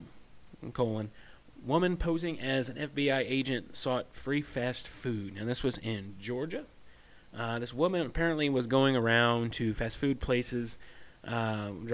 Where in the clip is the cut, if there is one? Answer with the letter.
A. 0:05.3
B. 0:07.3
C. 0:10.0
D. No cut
D